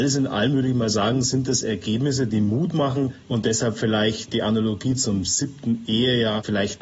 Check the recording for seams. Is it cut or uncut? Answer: uncut